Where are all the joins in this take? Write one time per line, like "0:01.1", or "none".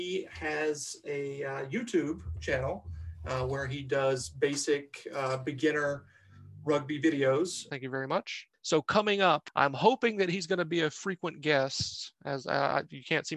0:07.7